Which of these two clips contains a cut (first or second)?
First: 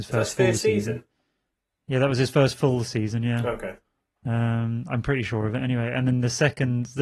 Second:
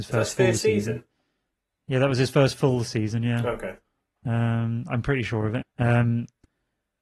second